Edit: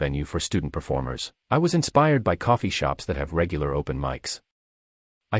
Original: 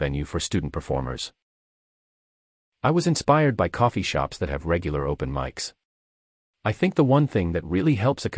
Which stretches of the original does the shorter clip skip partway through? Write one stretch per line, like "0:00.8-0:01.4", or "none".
0:01.4-0:02.7